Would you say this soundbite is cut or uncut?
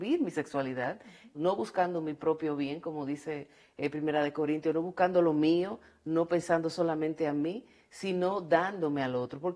cut